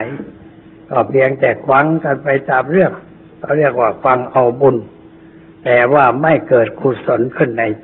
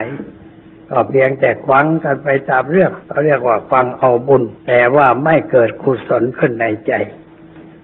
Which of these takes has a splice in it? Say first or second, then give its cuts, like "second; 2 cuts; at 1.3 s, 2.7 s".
second; 2 cuts; at 3.0 s, 4.6 s